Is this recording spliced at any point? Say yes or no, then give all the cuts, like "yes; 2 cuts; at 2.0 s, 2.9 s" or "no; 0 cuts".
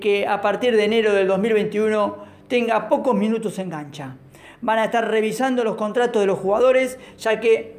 no; 0 cuts